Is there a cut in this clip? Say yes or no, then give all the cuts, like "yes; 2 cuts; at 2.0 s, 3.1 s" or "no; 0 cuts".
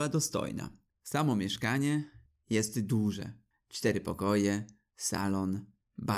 yes; 1 cut; at 0.9 s